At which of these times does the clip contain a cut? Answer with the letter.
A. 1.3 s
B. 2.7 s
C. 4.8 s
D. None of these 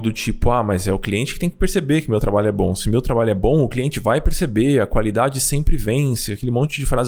D